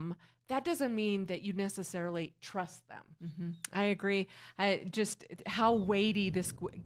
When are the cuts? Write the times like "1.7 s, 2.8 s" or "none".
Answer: 3.2 s